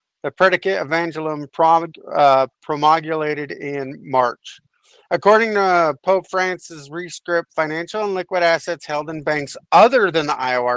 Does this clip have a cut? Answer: no; 0 cuts

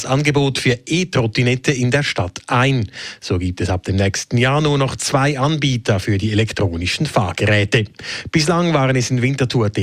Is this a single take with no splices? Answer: yes; 0 cuts

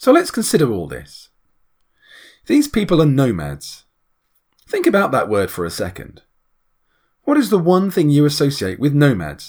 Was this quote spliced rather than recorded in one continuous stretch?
no; 0 cuts

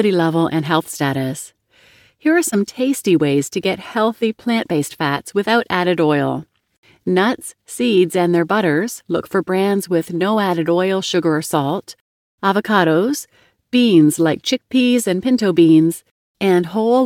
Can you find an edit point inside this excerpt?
no; 0 cuts

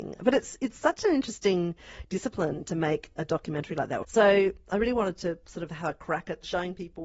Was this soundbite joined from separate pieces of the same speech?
yes; 1 cut; at 4.0 s

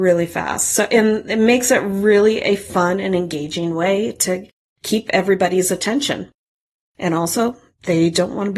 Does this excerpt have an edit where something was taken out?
no; 0 cuts

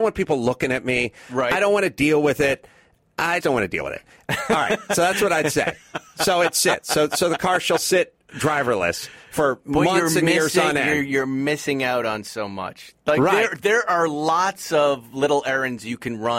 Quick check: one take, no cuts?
no; 1 cut; at 3.4 s

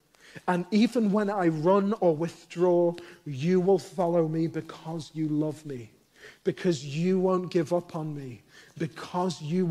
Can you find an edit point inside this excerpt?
no; 0 cuts

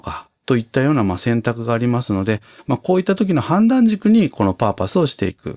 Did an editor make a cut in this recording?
no; 0 cuts

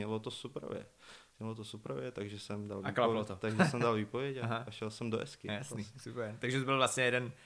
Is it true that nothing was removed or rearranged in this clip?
yes; 0 cuts

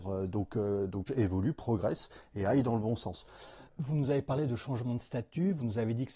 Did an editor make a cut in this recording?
yes; 2 cuts; at 1.1 s, 3.7 s

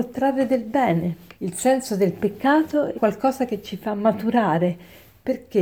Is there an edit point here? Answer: yes; 2 cuts; at 1.4 s, 3.0 s

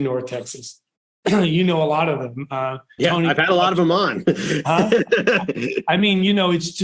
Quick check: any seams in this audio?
yes; 1 cut; at 3.0 s

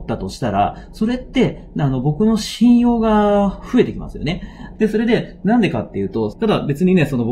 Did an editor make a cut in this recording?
yes; 2 cuts; at 4.8 s, 6.3 s

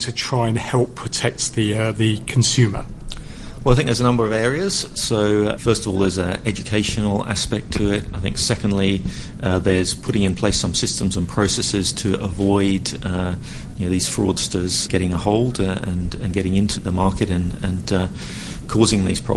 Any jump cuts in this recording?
yes; 3 cuts; at 5.6 s, 14.9 s, 16.8 s

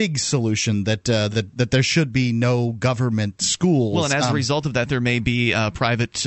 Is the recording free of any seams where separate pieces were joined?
yes; 0 cuts

